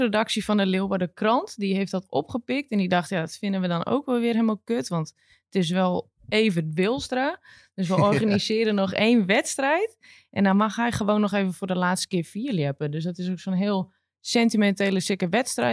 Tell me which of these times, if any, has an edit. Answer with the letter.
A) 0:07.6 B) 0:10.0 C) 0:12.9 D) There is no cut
D